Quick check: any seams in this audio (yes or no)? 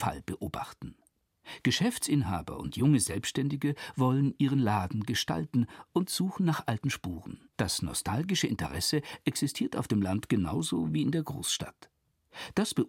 yes